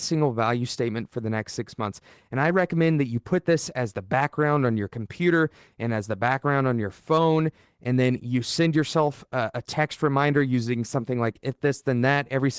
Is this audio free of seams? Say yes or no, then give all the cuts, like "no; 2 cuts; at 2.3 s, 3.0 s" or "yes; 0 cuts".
yes; 0 cuts